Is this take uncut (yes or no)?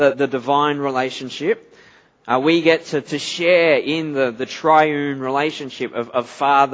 yes